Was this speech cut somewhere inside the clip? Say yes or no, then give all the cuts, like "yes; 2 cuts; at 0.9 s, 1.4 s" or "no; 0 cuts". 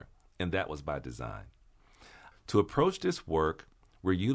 yes; 1 cut; at 2.3 s